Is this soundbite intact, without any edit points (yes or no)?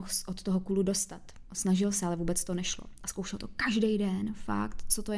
yes